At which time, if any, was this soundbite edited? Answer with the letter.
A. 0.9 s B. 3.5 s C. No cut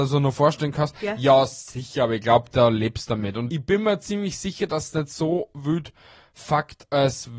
B